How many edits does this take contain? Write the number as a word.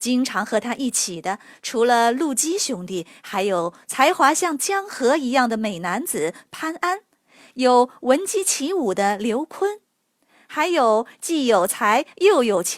zero